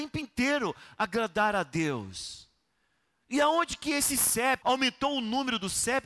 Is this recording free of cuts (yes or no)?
no